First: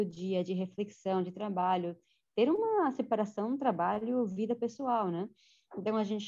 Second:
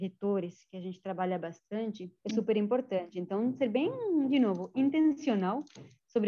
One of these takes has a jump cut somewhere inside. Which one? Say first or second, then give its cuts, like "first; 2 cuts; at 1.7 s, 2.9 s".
second; 1 cut; at 2.2 s